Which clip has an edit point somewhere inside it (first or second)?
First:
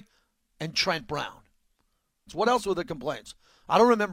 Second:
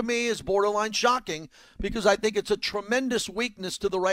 first